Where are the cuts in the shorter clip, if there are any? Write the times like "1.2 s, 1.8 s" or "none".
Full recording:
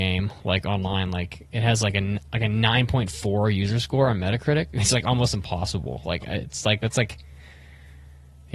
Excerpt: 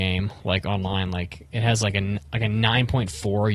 none